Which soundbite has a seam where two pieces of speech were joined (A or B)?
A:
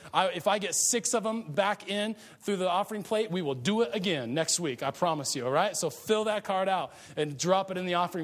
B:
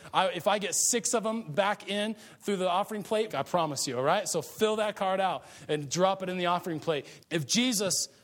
B